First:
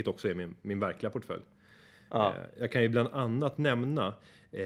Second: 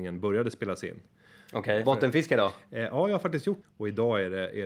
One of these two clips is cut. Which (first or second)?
second